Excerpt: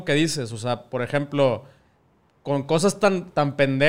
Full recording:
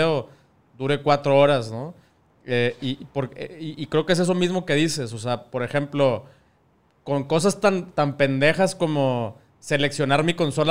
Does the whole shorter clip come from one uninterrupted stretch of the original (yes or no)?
yes